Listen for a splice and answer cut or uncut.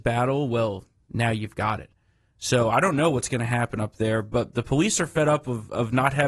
uncut